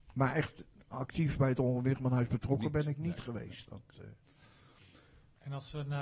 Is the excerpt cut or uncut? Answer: uncut